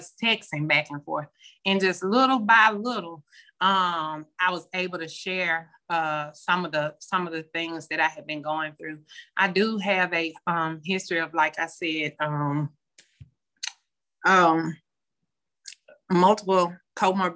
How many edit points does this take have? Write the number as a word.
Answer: one